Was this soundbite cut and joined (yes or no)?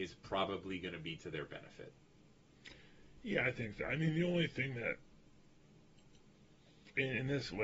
no